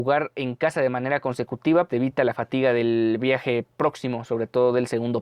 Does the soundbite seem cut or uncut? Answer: cut